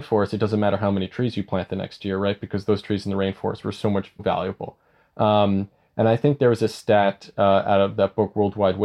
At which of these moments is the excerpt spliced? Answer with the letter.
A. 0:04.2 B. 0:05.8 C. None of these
A